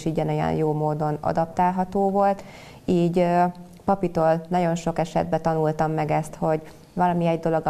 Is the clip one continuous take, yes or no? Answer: yes